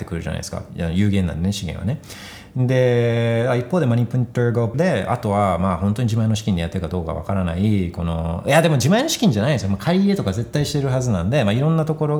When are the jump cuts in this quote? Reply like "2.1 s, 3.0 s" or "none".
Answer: 4.7 s